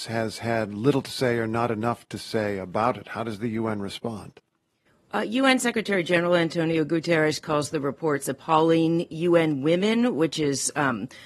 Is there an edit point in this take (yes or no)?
no